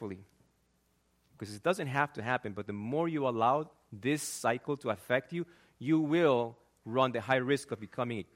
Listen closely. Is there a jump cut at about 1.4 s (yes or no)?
yes